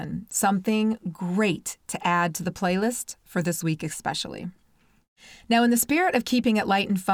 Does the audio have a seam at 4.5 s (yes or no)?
no